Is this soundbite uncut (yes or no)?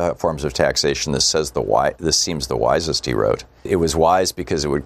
no